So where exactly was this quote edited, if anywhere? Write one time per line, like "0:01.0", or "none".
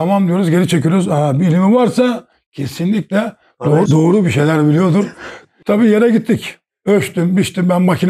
0:03.9
0:05.4